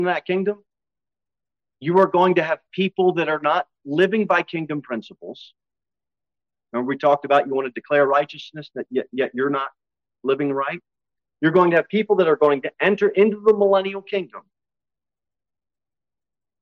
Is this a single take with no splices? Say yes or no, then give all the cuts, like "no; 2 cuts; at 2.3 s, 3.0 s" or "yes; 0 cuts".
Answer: yes; 0 cuts